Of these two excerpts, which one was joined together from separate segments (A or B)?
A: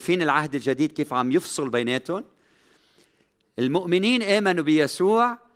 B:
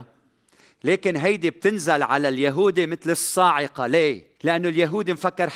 B